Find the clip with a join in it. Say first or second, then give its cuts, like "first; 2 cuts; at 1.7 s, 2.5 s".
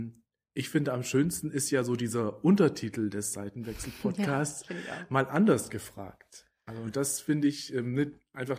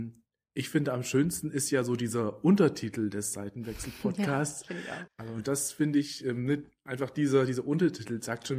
second; 1 cut; at 5.1 s